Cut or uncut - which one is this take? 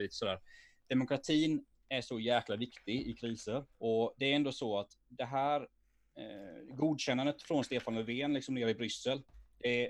cut